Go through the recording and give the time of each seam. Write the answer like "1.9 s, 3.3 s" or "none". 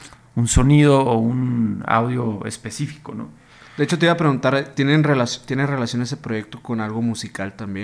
none